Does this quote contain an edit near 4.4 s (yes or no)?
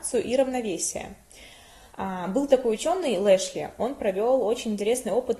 no